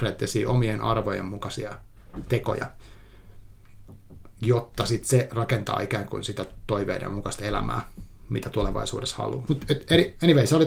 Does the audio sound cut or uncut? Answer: cut